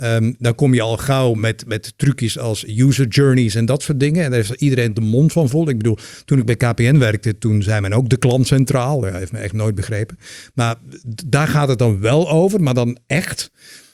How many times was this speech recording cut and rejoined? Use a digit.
0